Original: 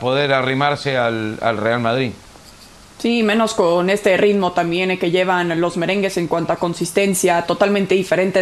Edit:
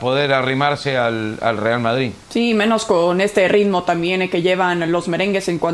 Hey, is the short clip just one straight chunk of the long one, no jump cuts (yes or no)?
no